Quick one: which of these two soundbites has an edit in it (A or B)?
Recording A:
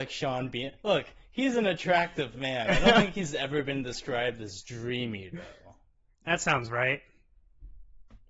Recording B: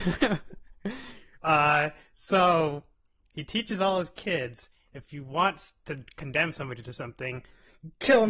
A